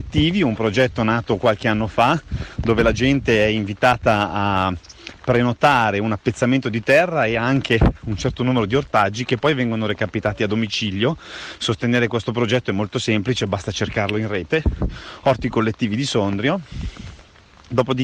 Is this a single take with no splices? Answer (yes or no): yes